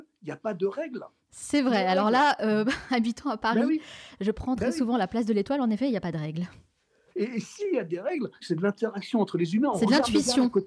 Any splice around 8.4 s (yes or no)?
yes